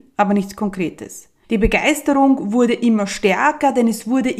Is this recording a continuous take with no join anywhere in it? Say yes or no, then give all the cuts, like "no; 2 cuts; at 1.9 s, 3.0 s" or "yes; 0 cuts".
no; 1 cut; at 1.4 s